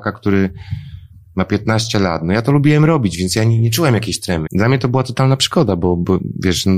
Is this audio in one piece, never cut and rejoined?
no; 1 cut; at 4.5 s

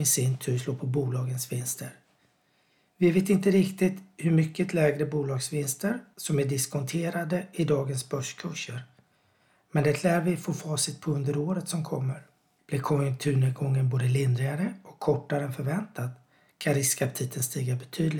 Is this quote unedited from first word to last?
yes; 0 cuts

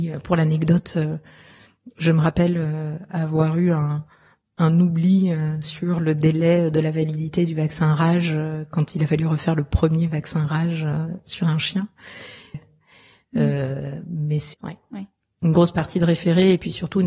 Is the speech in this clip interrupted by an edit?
yes; 2 cuts; at 12.5 s, 14.5 s

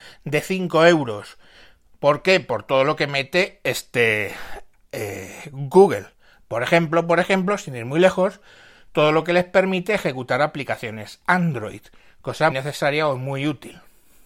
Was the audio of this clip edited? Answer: yes; 2 cuts; at 1.9 s, 12.5 s

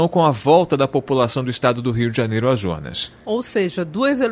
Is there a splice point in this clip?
no; 0 cuts

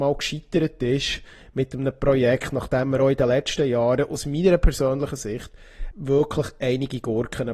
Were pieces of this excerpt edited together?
yes; 1 cut; at 5.9 s

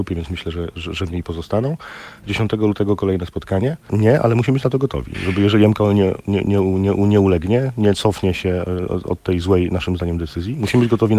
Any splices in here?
yes; 1 cut; at 3.9 s

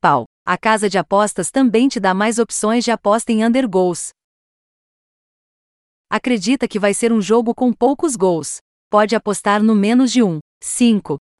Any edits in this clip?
no; 0 cuts

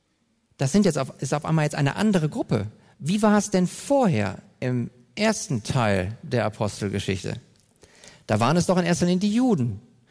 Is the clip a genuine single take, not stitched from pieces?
yes; 0 cuts

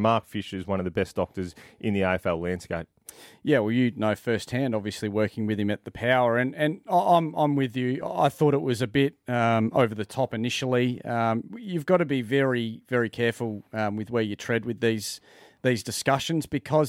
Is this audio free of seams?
yes; 0 cuts

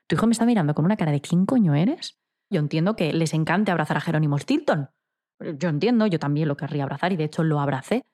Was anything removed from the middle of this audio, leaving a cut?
yes; 1 cut; at 2.5 s

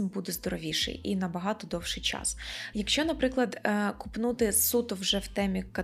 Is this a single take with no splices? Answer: no; 1 cut; at 2.7 s

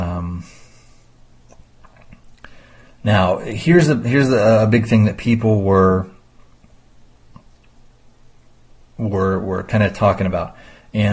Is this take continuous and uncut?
yes; 0 cuts

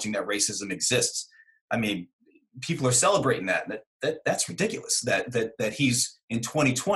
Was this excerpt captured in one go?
yes; 0 cuts

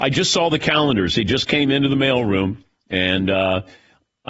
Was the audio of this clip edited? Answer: no; 0 cuts

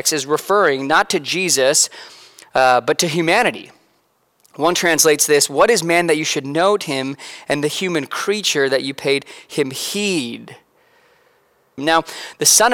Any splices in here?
yes; 1 cut; at 11.8 s

